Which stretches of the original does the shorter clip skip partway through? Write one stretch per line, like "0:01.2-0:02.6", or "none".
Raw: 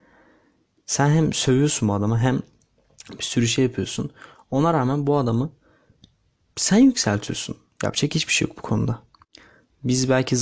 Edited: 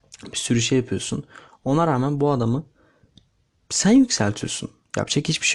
none